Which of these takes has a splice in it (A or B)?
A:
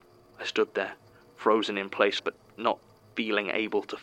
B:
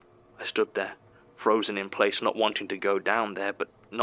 A